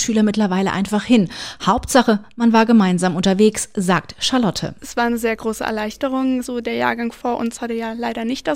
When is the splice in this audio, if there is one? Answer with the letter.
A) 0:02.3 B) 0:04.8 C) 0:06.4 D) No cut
C